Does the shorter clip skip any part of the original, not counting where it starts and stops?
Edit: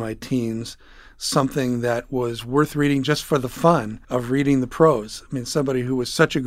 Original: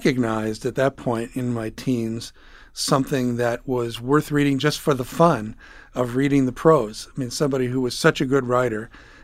yes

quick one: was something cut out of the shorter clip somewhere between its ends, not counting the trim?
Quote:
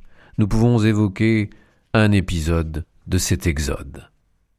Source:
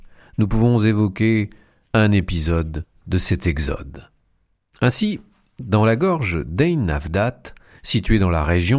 no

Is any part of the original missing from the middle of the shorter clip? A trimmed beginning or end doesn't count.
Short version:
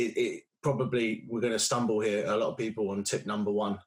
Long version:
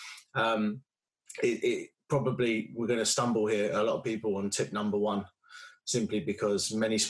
no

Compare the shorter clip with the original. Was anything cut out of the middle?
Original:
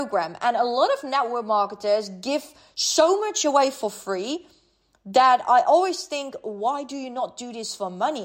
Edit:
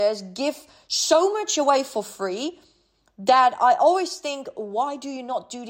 no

